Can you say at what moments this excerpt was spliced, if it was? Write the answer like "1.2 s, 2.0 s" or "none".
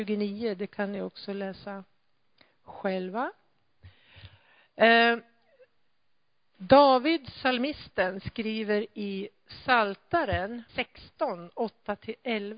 10.7 s